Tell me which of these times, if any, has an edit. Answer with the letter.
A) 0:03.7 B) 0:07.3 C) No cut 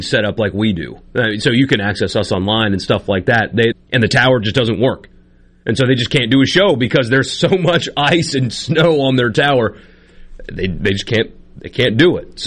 A